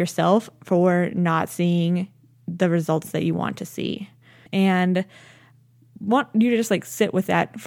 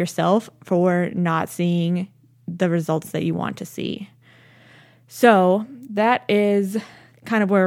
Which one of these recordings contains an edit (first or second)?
first